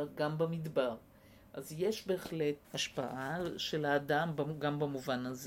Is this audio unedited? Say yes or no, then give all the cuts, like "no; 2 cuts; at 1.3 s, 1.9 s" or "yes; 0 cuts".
no; 1 cut; at 2.6 s